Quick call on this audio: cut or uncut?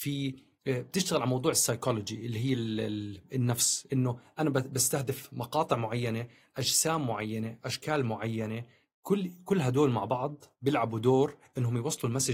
uncut